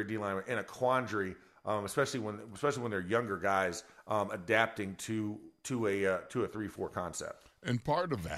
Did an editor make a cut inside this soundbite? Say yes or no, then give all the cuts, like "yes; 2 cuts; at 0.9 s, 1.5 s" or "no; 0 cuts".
no; 0 cuts